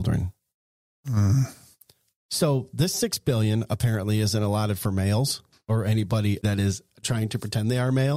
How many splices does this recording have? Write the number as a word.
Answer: zero